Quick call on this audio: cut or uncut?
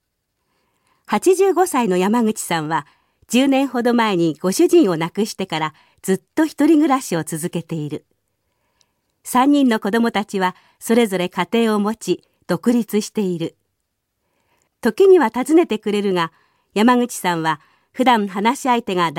uncut